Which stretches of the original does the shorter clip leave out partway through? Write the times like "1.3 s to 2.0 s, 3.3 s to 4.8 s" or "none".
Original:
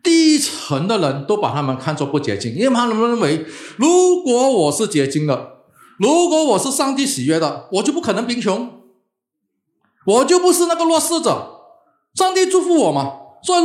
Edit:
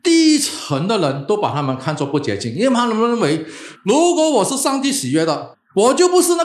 3.7 s to 5.9 s, 7.7 s to 9.8 s